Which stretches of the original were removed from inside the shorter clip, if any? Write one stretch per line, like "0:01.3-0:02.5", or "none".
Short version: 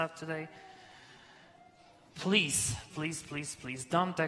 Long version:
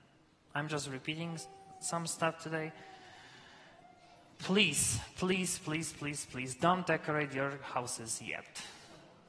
0:05.1-0:05.6